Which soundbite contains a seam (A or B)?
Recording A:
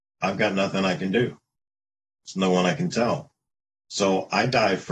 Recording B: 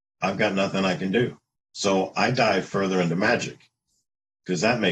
B